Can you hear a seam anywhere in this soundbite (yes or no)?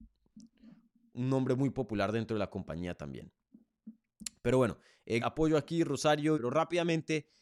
yes